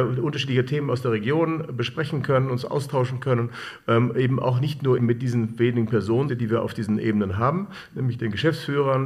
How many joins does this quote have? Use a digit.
2